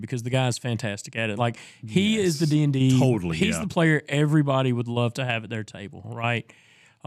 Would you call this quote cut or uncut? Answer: uncut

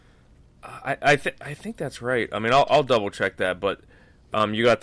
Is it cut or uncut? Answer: uncut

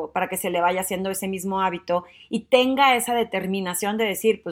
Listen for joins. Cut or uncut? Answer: uncut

